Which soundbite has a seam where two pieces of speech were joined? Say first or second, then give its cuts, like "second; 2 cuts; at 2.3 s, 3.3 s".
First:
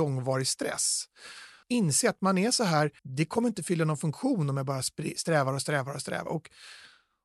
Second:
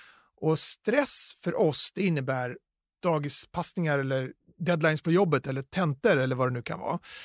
first; 3 cuts; at 1.6 s, 3.0 s, 6.3 s